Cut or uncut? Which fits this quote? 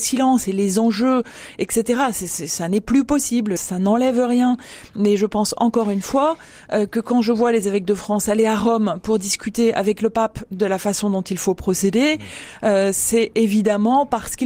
cut